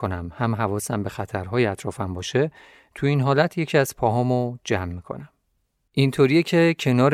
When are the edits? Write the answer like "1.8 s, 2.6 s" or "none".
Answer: 5.9 s